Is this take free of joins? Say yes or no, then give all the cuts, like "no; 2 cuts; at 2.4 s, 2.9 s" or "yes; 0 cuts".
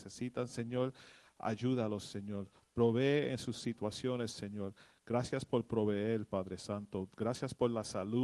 no; 1 cut; at 4.9 s